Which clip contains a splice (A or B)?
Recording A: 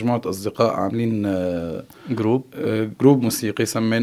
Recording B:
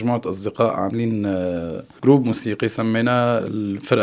B